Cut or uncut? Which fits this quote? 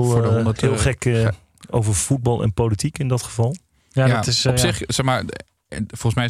uncut